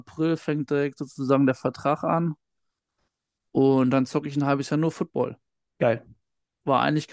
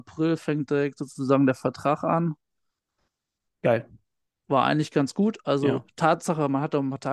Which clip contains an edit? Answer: second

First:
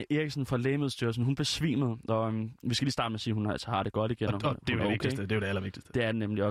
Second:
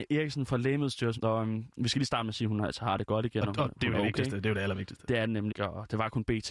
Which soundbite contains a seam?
second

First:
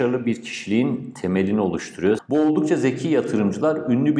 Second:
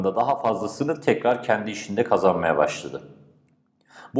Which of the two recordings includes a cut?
first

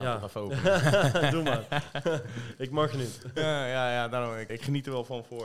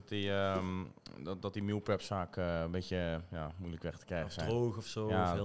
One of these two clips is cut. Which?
first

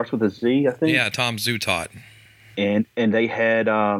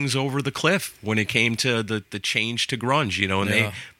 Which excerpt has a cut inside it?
first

